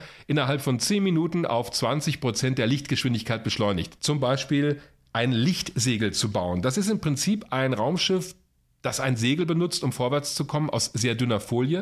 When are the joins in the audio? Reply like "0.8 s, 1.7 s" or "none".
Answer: 4.0 s